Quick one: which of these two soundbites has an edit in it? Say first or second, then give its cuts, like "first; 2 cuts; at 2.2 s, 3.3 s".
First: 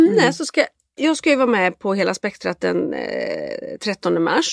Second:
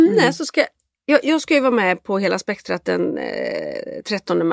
first; 1 cut; at 1.0 s